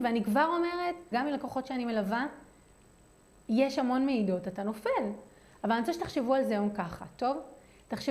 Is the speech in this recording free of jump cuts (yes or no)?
no